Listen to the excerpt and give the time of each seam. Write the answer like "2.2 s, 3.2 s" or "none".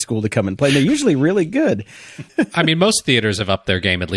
2.3 s